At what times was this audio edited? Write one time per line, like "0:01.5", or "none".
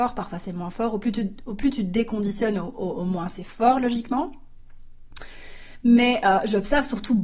none